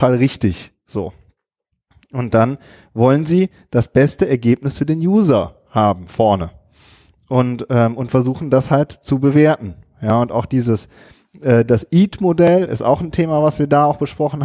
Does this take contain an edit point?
no; 0 cuts

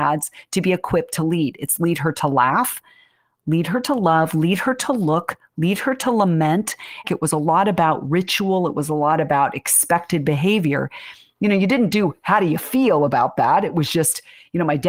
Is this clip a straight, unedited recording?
no; 1 cut; at 7.0 s

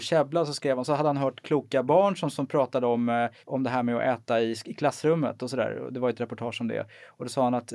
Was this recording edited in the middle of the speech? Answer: yes; 1 cut; at 3.4 s

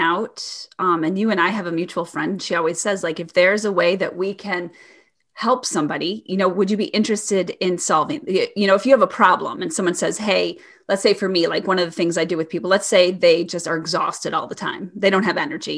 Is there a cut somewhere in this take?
no; 0 cuts

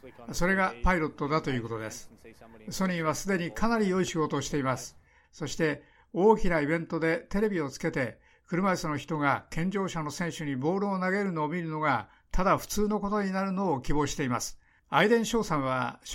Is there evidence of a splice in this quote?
yes; 2 cuts; at 5.2 s, 14.8 s

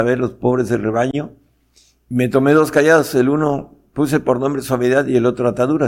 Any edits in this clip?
no; 0 cuts

